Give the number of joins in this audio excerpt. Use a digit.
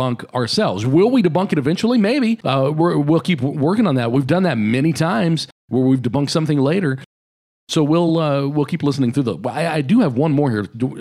0